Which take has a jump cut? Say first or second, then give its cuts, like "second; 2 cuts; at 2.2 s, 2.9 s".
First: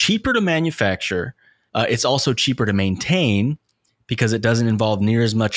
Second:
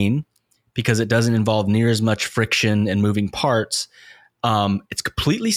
first; 1 cut; at 1.7 s